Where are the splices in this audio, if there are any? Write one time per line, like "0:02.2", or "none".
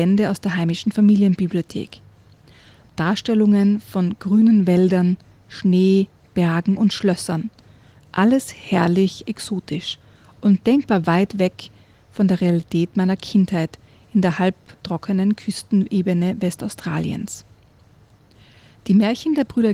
none